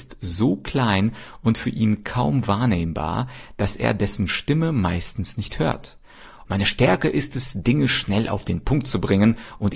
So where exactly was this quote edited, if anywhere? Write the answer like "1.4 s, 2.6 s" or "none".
6.4 s